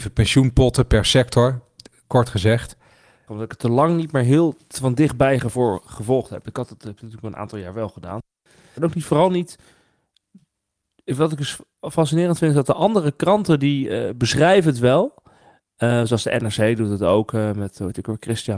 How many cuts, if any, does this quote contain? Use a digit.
2